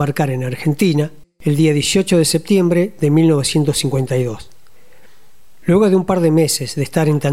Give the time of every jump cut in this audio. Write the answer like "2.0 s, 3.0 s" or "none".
1.2 s, 5.6 s